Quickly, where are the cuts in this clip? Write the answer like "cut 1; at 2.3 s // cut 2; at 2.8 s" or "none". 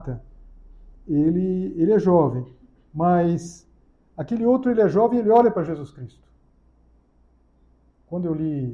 none